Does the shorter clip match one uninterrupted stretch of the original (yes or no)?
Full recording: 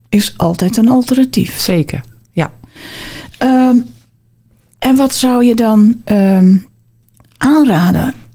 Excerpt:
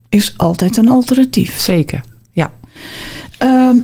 yes